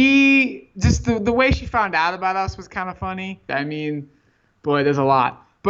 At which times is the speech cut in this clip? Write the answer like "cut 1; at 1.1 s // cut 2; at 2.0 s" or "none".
cut 1; at 3.5 s